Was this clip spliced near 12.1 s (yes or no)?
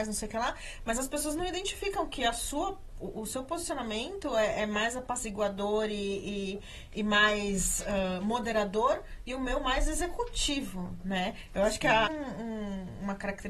yes